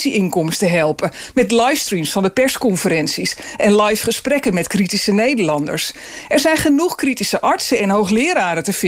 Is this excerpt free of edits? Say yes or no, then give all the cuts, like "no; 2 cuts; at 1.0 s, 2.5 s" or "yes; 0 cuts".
yes; 0 cuts